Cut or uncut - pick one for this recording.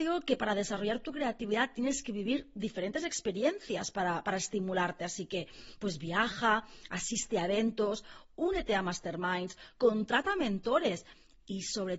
uncut